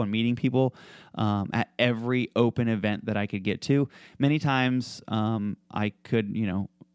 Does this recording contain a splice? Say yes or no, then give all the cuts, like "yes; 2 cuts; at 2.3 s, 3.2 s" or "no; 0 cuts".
no; 0 cuts